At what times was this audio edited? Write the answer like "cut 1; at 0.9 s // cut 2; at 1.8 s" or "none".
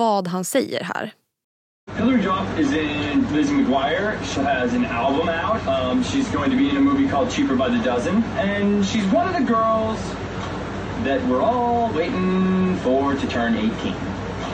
cut 1; at 4.3 s